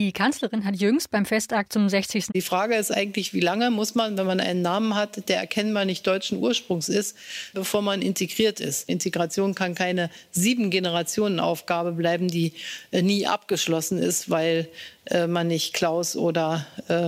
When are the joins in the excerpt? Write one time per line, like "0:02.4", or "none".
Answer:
0:02.3
0:07.5

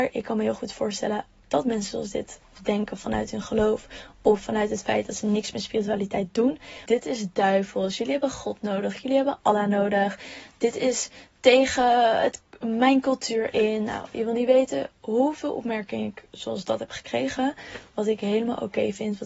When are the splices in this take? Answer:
0:06.9

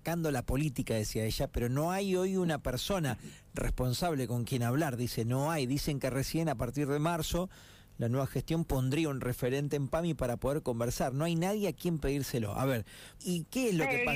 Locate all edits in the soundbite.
0:13.2

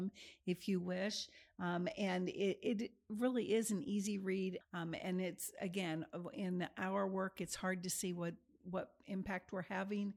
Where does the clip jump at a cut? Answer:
0:04.6

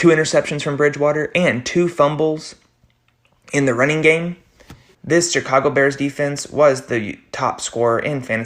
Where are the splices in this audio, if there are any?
0:04.9

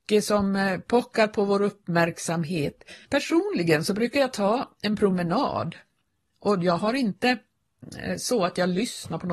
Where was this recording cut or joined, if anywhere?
0:03.1

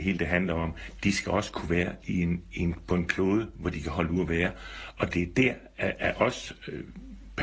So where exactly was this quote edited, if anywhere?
none

